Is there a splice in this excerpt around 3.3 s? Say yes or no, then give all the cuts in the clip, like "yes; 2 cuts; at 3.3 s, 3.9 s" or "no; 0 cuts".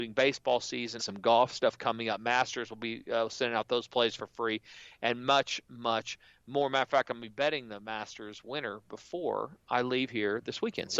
no; 1 cut; at 1.0 s